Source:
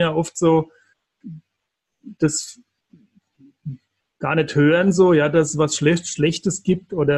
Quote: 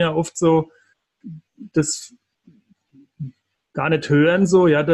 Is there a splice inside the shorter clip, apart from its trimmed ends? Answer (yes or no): yes